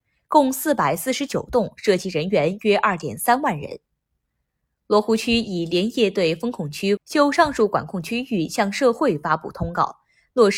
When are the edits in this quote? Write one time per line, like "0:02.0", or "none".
0:07.0